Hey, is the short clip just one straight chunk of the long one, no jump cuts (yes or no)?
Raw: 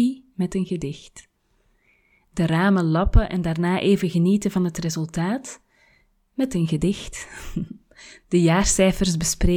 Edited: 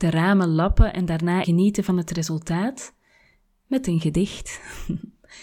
no